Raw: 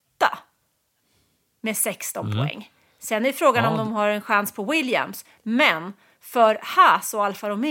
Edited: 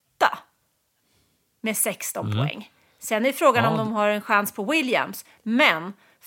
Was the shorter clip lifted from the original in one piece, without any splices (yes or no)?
yes